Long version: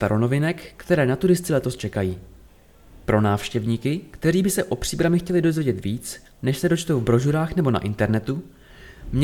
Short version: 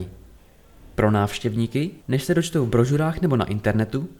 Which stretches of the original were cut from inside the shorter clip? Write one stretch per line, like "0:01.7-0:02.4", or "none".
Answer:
0:04.1-0:06.3